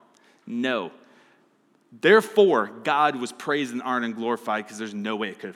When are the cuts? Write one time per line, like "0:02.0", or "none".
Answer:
none